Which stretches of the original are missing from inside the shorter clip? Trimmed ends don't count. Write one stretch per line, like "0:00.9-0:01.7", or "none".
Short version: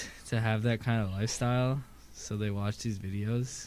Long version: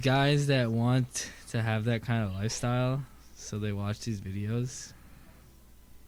none

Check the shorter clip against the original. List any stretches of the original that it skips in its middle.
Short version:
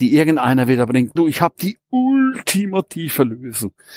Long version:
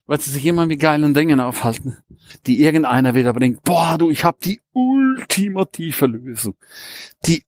0:03.6-0:04.0

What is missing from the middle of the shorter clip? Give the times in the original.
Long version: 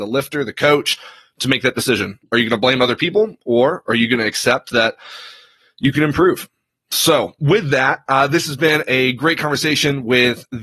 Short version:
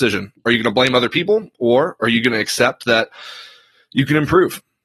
none

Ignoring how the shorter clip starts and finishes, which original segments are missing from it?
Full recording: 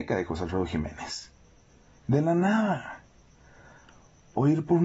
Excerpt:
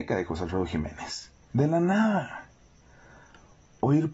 0:01.4-0:02.0

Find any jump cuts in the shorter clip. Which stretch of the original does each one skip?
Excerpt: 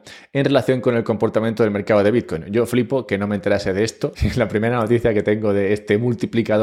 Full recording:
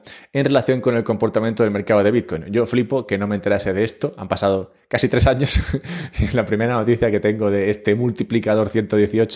0:04.1-0:06.1

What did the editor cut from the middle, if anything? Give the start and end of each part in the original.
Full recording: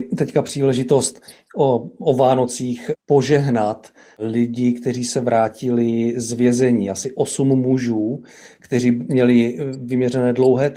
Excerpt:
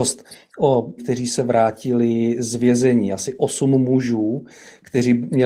0:01.9-0:04.8

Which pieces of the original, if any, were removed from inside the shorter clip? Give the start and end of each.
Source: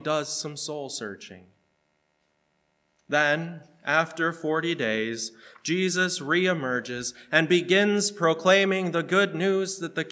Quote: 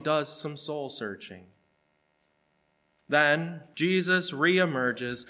0:03.7-0:05.6

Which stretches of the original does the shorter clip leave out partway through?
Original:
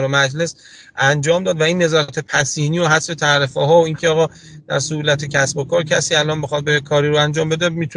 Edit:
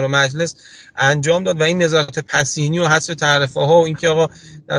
none

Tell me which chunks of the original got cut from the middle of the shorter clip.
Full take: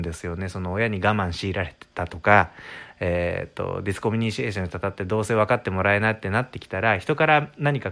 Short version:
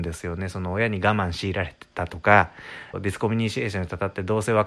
0:02.9-0:03.8

